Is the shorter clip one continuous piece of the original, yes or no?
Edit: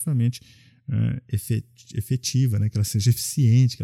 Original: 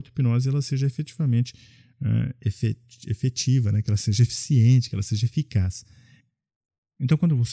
yes